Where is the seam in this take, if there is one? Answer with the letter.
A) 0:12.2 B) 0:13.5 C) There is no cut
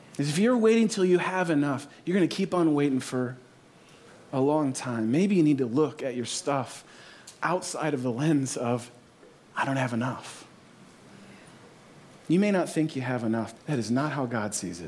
B